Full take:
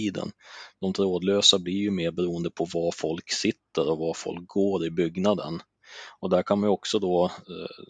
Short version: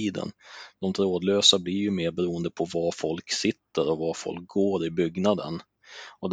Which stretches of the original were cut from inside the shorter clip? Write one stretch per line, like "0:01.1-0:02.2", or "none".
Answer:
none